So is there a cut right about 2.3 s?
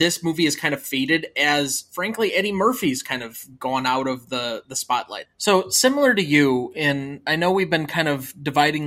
no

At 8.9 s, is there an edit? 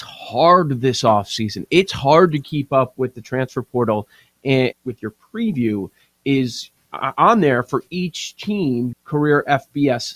yes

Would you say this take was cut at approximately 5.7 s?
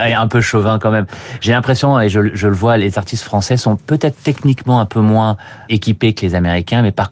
yes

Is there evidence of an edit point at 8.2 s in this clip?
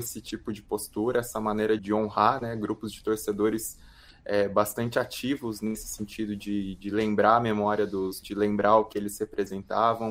yes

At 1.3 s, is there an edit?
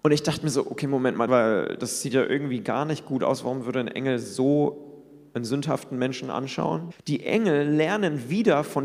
yes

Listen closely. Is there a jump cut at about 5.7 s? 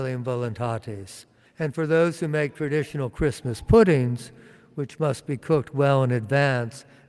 no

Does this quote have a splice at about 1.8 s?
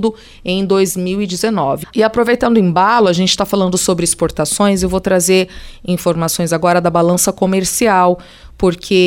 yes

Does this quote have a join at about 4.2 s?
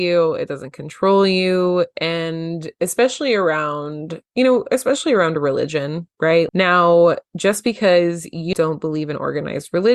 no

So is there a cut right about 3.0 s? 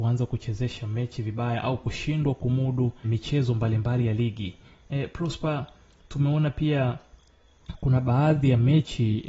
yes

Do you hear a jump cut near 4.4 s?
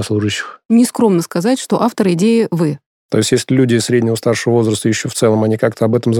no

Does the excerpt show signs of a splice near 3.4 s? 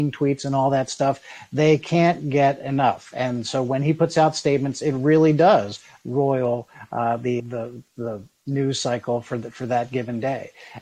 no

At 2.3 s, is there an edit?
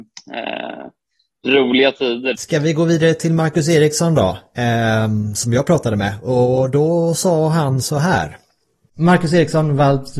yes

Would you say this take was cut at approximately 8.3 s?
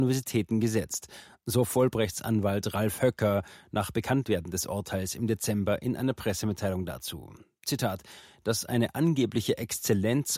yes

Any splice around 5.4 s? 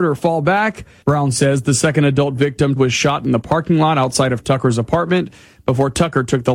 no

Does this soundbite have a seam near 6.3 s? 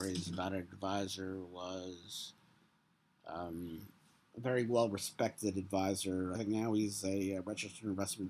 yes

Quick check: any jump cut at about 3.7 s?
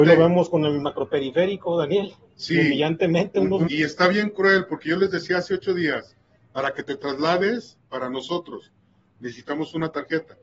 yes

